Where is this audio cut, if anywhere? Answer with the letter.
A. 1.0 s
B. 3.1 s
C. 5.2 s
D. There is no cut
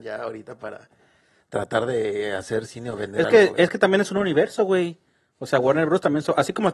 D